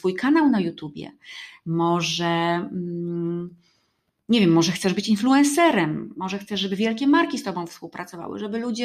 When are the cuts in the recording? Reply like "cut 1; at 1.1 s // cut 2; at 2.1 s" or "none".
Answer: none